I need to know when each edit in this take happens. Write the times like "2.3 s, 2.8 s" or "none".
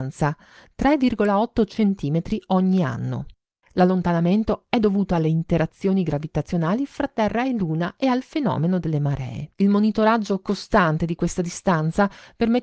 9.5 s

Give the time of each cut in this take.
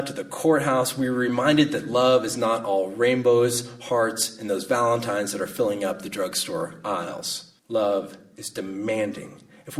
7.6 s

